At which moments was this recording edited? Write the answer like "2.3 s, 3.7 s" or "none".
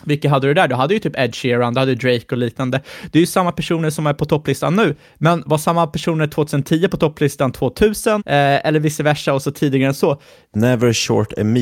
8.2 s, 10.4 s